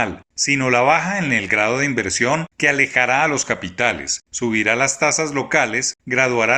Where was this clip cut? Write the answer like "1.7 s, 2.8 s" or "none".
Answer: none